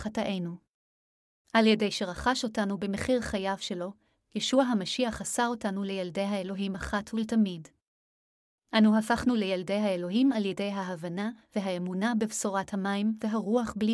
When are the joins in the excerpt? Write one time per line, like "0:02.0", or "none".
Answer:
0:01.4